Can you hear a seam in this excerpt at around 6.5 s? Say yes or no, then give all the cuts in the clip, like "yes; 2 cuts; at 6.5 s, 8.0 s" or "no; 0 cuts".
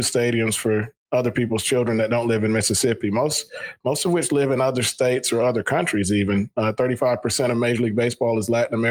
no; 0 cuts